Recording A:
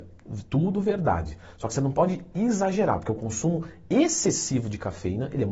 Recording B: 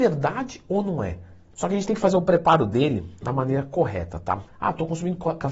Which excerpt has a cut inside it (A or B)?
B